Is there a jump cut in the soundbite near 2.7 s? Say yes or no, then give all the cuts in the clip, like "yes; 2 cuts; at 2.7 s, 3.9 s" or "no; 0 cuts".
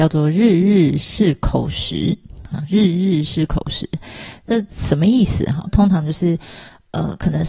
no; 1 cut; at 5.7 s